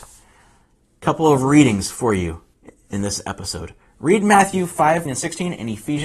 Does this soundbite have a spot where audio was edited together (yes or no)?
yes